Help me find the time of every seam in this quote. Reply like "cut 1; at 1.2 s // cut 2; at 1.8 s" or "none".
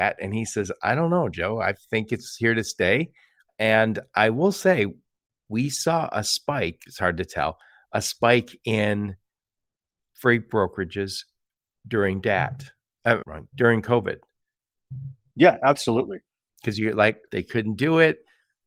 cut 1; at 6.9 s // cut 2; at 15.3 s // cut 3; at 17.3 s

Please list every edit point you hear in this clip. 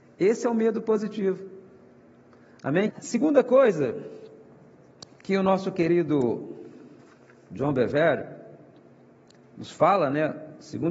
cut 1; at 2.9 s

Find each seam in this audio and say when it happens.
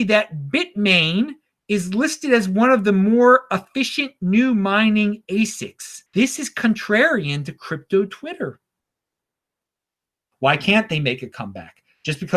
cut 1; at 6.1 s // cut 2; at 10.3 s

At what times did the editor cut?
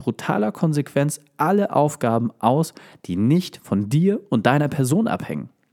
none

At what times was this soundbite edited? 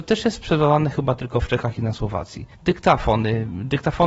cut 1; at 2.5 s

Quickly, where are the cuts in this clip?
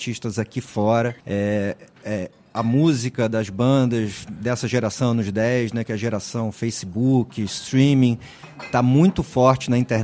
cut 1; at 1.2 s

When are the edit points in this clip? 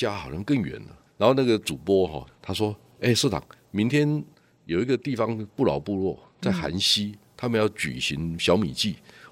cut 1; at 1.1 s // cut 2; at 2.3 s

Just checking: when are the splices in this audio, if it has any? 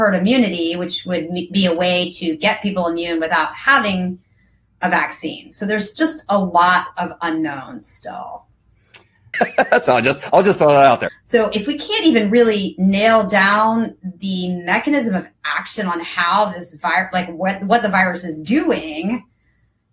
cut 1; at 9.3 s // cut 2; at 11.1 s

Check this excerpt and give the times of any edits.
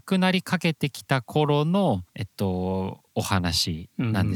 cut 1; at 2.1 s

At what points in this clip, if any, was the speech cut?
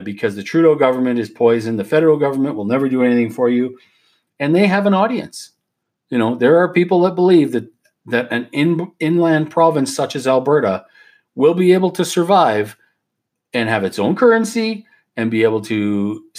none

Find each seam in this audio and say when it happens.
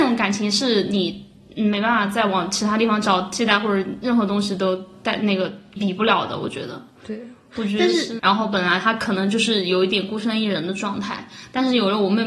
cut 1; at 5.8 s // cut 2; at 8.2 s

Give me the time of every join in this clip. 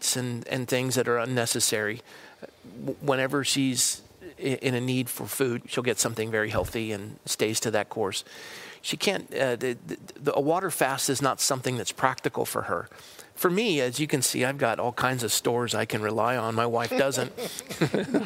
cut 1; at 5.6 s // cut 2; at 8.8 s

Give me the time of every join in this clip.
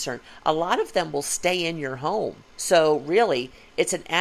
cut 1; at 2.5 s

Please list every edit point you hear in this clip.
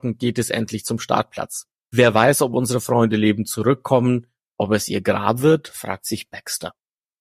cut 1; at 1.8 s

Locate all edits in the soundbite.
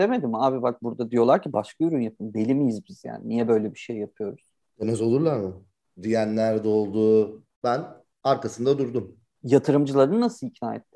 cut 1; at 7.5 s

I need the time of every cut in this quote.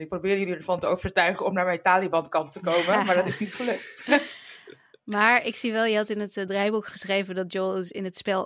none

